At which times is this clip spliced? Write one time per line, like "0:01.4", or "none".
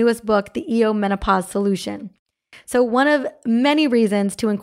0:02.5

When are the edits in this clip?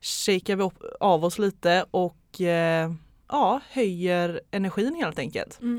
none

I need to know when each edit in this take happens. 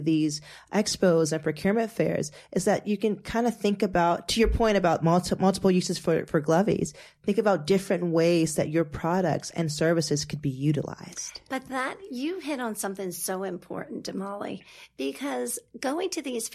none

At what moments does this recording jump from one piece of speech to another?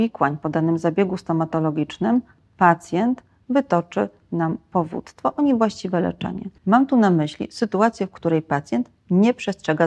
0:06.6

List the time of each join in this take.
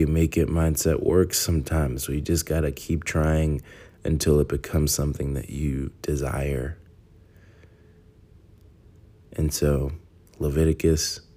none

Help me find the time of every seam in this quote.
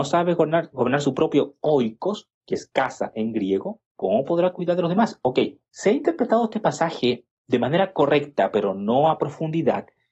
0:03.9

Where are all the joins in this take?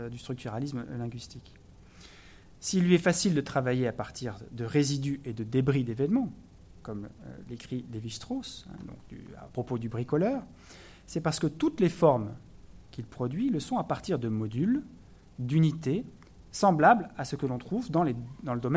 0:02.6

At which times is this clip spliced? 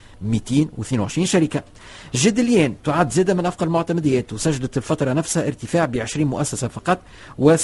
none

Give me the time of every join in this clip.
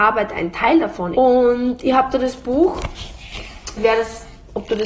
0:01.1
0:03.8

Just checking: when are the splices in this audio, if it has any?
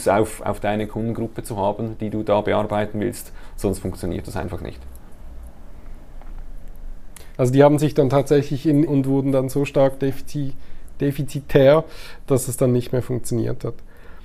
0:07.4
0:08.8

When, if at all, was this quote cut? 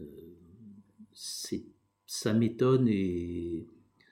none

